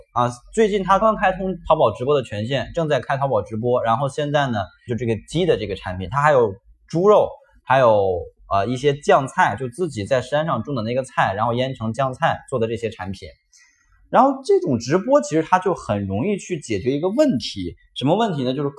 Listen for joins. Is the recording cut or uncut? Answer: cut